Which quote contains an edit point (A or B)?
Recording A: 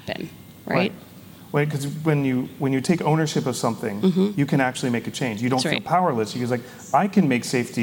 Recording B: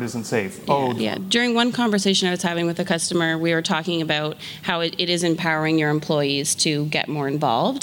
B